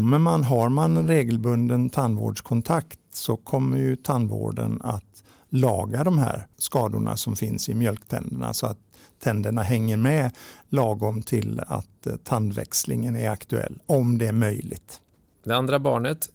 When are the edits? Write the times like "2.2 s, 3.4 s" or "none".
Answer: none